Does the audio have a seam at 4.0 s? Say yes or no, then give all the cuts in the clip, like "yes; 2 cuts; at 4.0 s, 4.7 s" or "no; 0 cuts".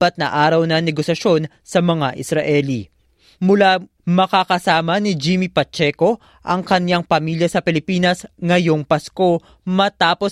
yes; 1 cut; at 4.0 s